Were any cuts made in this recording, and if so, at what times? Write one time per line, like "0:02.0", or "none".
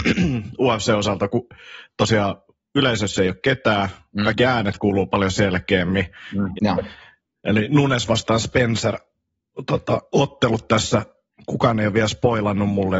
0:06.6

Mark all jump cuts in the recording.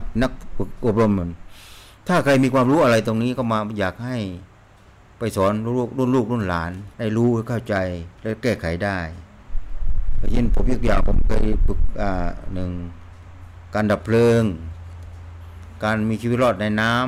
0:06.9
0:08.2

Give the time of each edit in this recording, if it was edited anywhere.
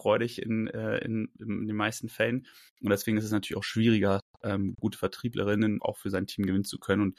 0:04.7
0:05.8

